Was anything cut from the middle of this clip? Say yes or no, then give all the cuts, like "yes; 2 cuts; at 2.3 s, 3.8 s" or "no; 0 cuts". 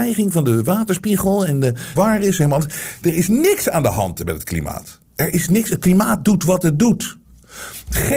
yes; 2 cuts; at 2.0 s, 5.1 s